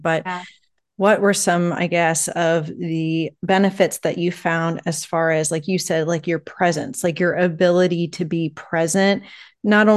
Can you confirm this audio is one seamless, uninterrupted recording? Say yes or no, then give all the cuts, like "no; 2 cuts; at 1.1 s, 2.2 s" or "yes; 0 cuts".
yes; 0 cuts